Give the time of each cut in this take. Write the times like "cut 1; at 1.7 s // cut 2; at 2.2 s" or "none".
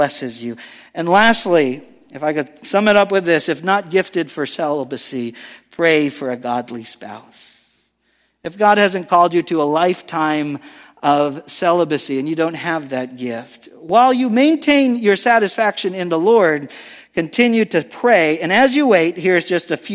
none